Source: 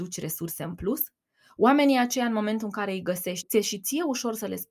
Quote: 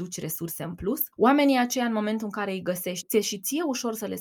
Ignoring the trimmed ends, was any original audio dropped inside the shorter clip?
yes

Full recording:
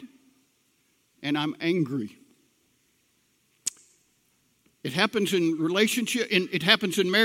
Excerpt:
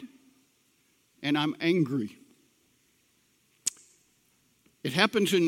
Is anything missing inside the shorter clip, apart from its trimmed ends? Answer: no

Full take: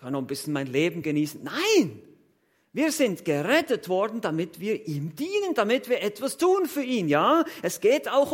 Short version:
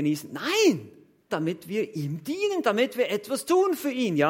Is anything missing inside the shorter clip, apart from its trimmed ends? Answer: yes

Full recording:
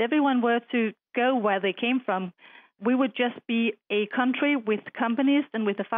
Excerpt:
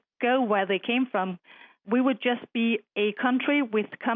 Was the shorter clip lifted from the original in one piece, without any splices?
yes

